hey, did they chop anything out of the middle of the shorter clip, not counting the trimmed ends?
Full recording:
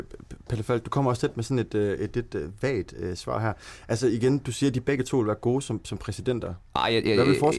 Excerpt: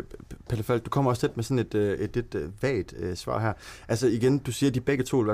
no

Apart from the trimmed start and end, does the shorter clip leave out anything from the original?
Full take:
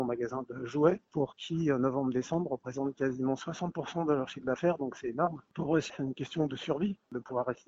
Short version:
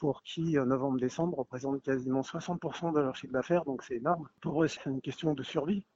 no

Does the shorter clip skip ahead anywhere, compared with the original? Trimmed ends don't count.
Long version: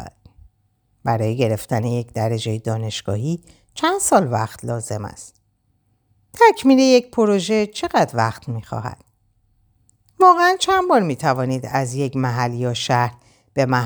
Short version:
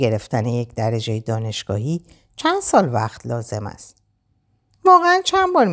yes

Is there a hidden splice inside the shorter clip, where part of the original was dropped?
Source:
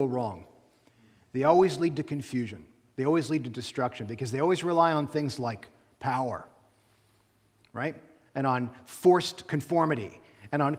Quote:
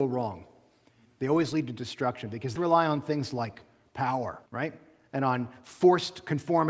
yes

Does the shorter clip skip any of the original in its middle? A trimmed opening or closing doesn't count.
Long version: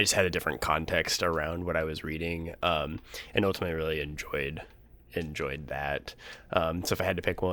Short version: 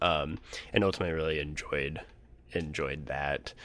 no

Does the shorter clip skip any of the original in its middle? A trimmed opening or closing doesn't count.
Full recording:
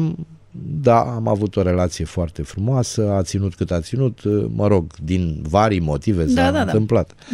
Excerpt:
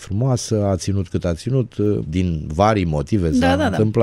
yes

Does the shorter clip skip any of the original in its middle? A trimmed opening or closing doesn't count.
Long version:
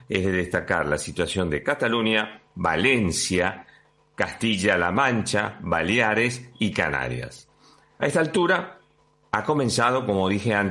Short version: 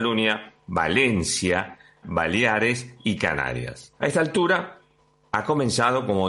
yes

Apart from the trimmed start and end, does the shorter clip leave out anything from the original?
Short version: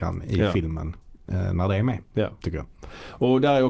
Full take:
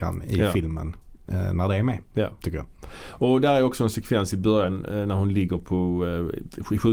no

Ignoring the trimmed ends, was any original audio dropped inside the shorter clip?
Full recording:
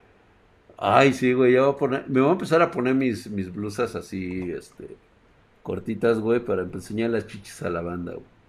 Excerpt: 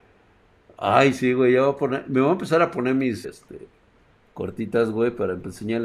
yes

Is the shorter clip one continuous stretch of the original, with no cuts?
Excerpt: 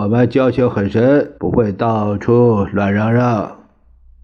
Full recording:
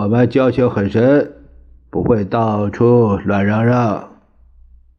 no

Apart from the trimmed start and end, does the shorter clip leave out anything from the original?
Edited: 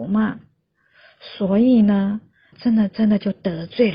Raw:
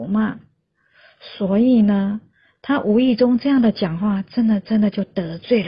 yes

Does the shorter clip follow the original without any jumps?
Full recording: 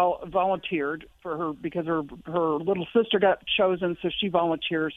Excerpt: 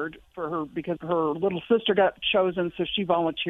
no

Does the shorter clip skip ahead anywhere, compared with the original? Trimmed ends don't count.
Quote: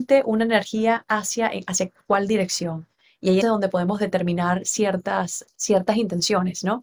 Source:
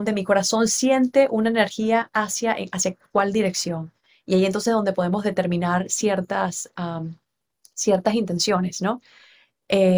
yes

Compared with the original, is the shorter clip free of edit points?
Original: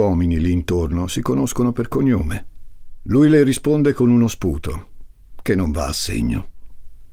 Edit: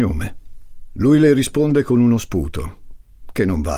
yes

